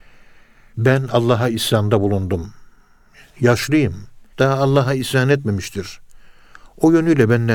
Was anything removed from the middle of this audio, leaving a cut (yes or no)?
yes